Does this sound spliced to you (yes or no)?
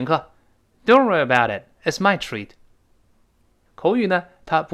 yes